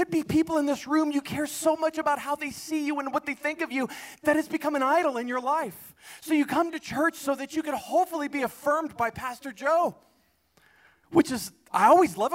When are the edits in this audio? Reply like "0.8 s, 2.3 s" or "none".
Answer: none